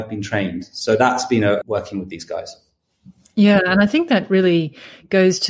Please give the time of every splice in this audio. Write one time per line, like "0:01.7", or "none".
0:01.6